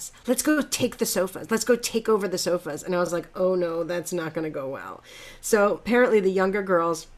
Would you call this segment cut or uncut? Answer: uncut